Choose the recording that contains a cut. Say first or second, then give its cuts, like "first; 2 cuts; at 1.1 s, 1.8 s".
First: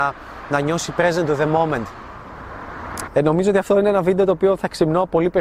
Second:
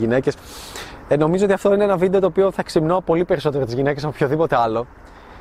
first; 1 cut; at 3.1 s